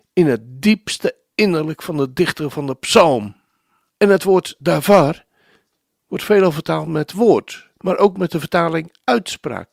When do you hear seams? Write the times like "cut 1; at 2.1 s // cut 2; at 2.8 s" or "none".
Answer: cut 1; at 3.9 s // cut 2; at 7.8 s